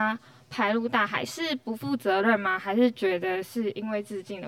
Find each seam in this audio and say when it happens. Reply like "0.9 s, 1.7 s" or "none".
none